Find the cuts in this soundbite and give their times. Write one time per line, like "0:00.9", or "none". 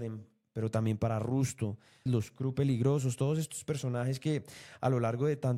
0:02.1